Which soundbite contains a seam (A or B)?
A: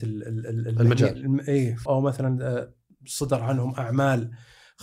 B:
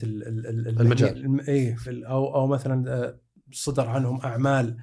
A